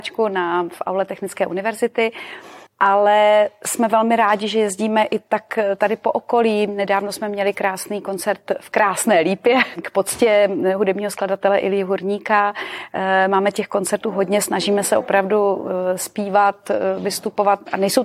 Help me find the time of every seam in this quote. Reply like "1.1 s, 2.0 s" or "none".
2.7 s